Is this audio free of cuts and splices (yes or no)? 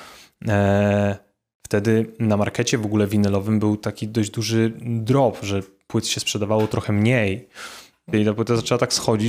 no